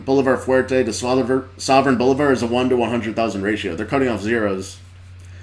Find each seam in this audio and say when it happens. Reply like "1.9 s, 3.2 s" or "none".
none